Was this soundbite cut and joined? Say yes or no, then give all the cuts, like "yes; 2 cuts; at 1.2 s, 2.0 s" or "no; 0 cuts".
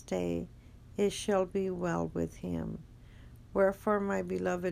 no; 0 cuts